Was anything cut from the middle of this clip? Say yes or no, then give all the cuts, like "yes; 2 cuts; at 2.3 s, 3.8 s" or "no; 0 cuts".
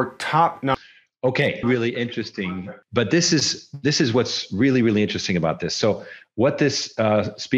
yes; 2 cuts; at 1.6 s, 2.8 s